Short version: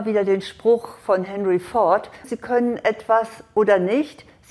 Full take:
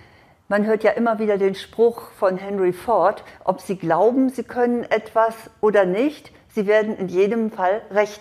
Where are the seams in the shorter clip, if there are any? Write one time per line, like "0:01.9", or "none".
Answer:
0:02.2